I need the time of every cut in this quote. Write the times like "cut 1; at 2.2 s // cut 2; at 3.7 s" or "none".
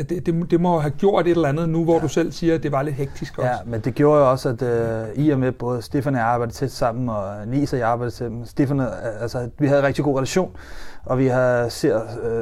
none